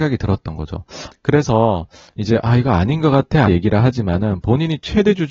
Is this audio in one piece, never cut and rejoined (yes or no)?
no